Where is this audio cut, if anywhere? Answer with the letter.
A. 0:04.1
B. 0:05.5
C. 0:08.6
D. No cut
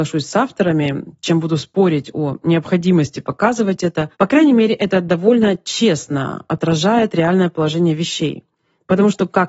A